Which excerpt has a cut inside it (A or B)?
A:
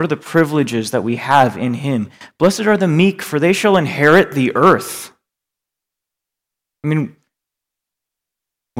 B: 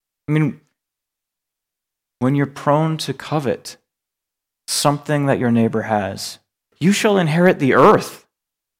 B